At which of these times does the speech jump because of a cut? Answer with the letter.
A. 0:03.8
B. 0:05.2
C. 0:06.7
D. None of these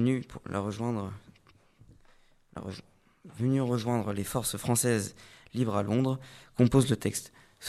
D